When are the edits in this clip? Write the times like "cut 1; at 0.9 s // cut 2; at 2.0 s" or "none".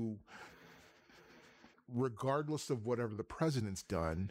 cut 1; at 1.7 s